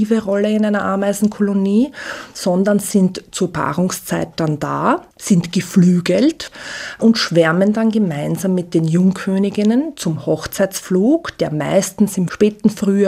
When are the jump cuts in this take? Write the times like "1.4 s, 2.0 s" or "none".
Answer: 5.1 s